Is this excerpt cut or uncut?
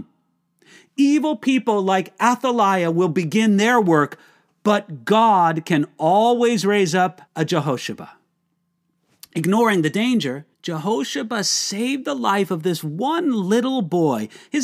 cut